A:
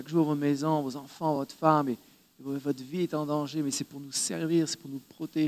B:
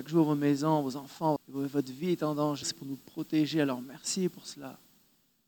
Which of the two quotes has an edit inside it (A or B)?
B